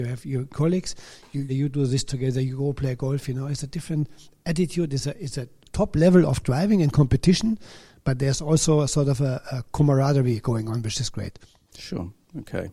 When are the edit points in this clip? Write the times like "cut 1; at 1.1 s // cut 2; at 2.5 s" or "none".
cut 1; at 1.5 s